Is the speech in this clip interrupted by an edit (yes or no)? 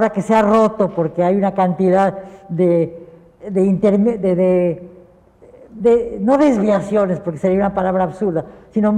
no